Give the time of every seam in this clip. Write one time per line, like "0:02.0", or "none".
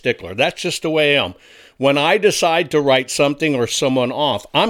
none